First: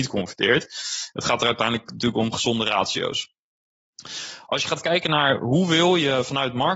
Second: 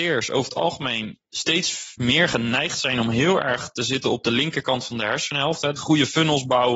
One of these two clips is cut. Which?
second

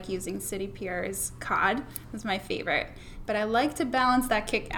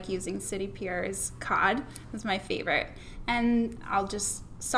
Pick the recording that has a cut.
first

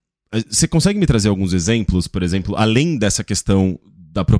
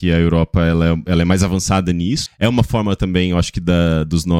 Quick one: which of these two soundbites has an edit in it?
second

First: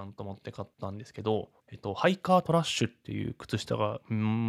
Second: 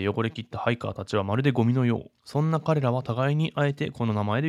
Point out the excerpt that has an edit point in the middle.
first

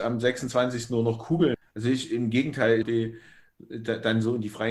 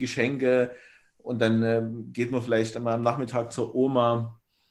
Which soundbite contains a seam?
first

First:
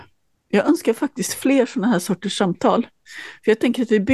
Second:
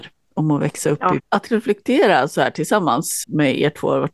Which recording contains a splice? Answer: second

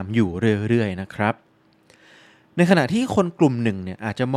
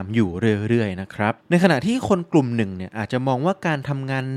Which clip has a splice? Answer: second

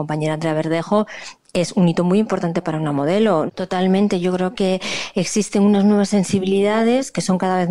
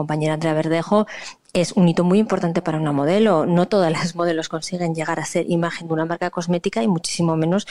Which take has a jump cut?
first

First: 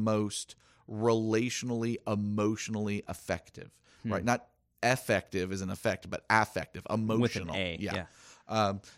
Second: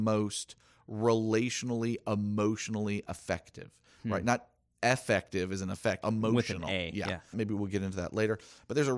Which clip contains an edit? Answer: second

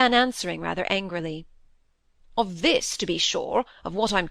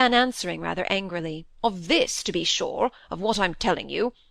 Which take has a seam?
second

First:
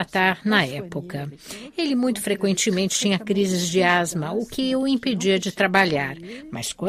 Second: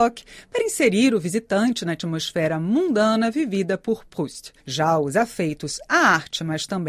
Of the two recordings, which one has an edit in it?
second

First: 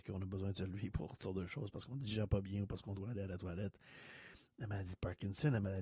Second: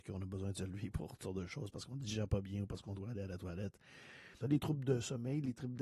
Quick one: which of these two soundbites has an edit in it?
second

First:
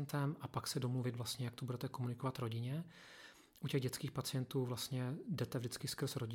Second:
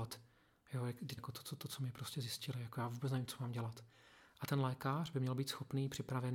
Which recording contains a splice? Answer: second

